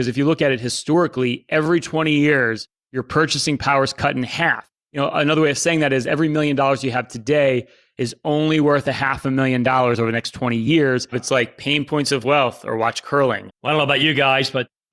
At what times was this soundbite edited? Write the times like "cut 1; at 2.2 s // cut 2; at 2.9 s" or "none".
cut 1; at 11.1 s // cut 2; at 13.5 s